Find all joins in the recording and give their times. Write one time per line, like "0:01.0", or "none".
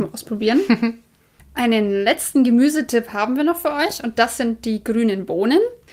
none